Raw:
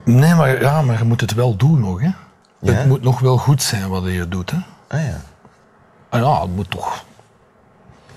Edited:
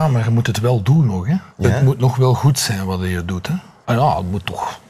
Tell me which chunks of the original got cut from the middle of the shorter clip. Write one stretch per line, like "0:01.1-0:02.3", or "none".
0:02.2-0:02.5
0:04.9-0:06.1